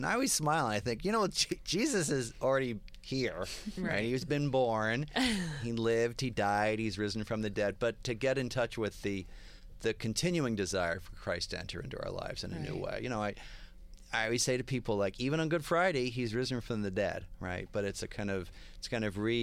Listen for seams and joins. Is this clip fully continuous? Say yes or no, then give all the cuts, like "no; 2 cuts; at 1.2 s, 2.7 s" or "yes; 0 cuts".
yes; 0 cuts